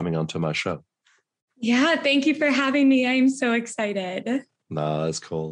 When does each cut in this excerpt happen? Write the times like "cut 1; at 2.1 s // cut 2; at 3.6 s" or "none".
none